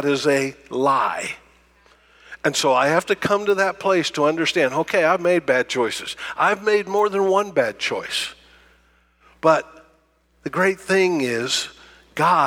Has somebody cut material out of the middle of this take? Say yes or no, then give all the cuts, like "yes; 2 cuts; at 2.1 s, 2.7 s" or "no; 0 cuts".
no; 0 cuts